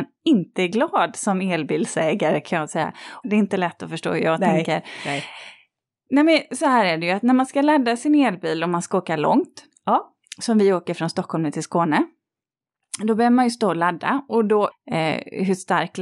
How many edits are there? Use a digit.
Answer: 2